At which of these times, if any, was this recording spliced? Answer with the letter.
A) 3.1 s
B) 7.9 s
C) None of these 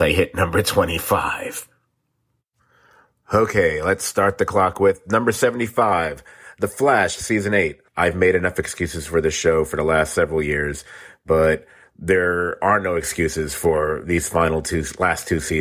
B